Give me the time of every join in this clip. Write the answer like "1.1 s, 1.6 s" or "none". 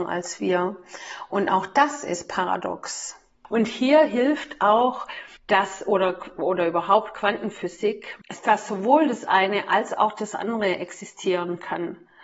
5.4 s, 8.2 s